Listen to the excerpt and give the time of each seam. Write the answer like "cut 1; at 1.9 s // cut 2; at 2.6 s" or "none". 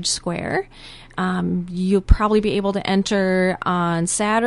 none

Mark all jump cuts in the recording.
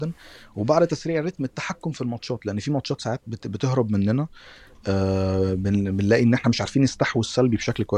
none

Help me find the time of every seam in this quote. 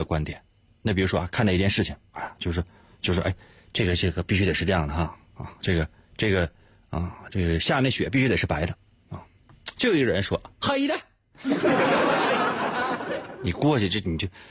none

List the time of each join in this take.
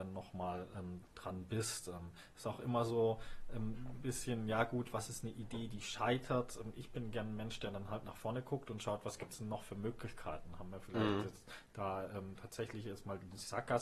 cut 1; at 1.1 s

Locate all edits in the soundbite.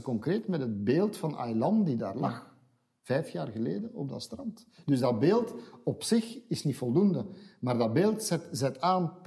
none

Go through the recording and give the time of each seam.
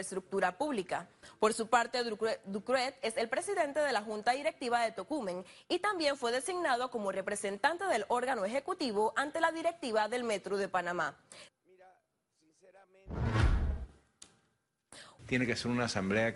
cut 1; at 11.5 s // cut 2; at 15.2 s

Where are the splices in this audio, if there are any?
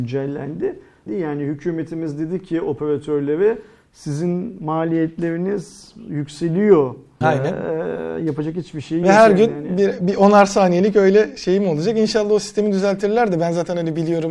cut 1; at 1.1 s // cut 2; at 7.2 s

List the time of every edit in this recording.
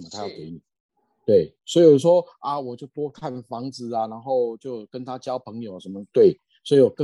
none

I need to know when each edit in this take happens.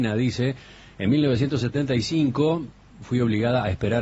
cut 1; at 2.9 s

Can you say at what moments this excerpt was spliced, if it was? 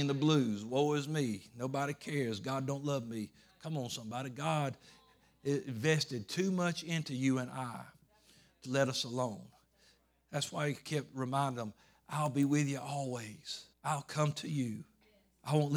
cut 1; at 8.6 s // cut 2; at 13.7 s

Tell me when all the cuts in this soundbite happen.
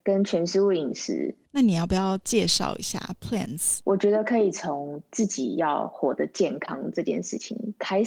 cut 1; at 1.4 s // cut 2; at 3.8 s

